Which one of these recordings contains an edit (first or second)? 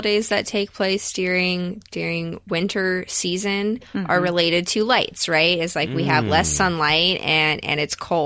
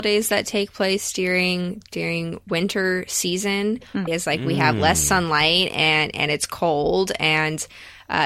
second